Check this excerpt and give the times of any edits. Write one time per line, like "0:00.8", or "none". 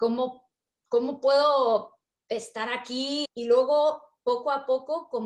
0:03.2